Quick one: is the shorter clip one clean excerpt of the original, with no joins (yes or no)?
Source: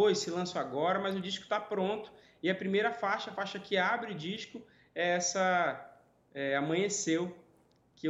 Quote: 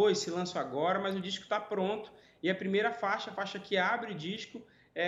yes